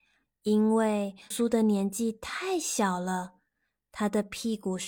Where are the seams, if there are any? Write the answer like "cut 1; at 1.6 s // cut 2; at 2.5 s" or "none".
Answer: cut 1; at 1.3 s